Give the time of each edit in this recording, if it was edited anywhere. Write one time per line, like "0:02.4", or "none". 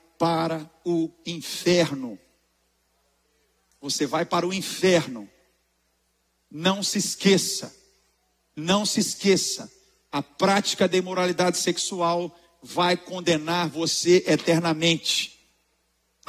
none